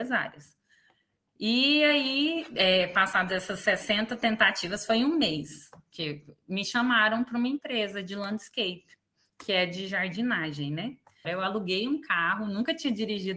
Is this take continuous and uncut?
no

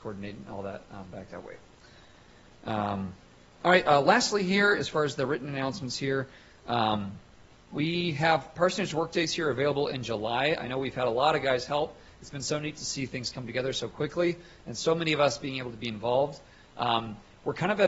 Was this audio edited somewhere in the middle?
no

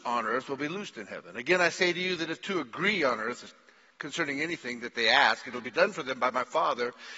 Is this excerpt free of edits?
yes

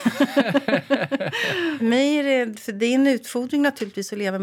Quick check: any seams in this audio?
yes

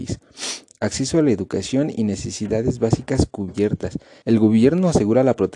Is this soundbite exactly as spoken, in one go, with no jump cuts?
no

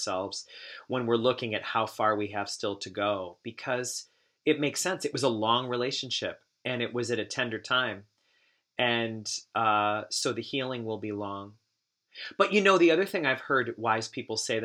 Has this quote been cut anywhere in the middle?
no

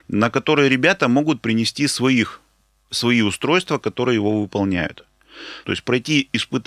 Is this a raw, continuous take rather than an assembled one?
no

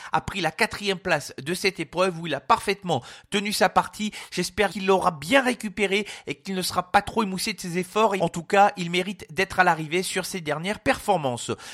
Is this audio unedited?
no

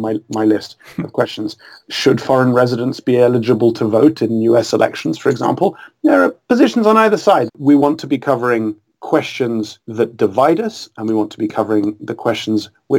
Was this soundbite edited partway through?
yes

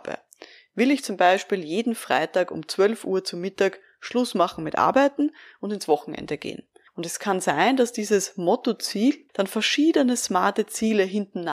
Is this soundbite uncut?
no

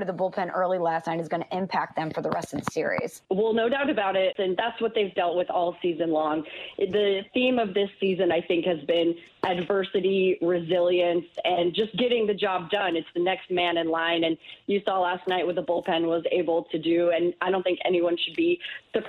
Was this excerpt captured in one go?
no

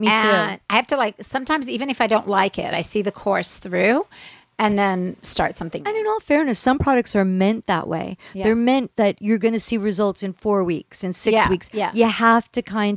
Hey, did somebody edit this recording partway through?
yes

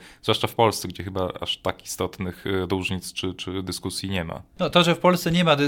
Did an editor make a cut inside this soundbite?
no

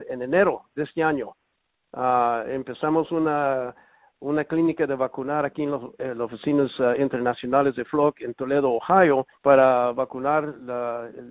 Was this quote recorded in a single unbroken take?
no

